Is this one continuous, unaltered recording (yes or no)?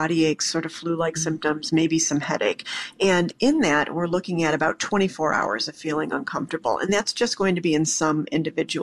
yes